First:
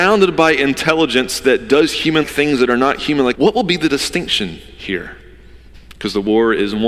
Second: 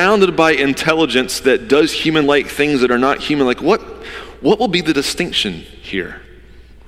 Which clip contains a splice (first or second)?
first